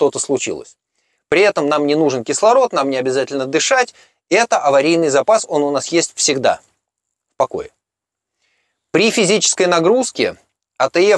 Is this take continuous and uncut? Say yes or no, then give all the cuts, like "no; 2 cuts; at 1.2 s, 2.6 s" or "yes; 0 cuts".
yes; 0 cuts